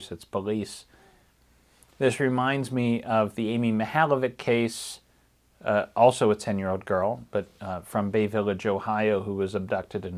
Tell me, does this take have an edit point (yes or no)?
no